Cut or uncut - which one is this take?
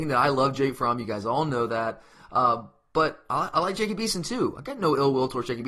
uncut